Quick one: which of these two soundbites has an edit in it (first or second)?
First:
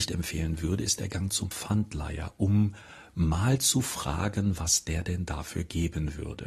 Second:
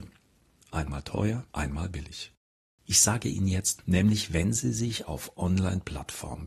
second